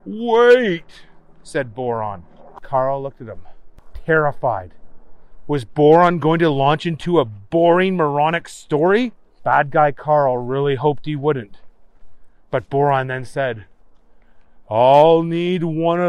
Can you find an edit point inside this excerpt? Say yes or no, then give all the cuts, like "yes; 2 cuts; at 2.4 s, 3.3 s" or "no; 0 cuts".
no; 0 cuts